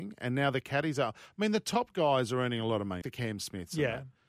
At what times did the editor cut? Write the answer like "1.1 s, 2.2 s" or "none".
3.0 s